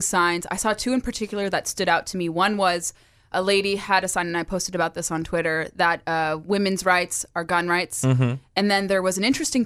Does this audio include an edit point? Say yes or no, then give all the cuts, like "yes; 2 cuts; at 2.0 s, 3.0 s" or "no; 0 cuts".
no; 0 cuts